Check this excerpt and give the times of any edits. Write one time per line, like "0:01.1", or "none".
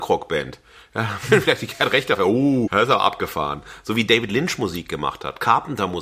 0:02.7